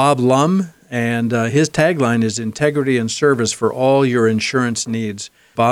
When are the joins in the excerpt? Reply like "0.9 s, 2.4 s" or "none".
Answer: none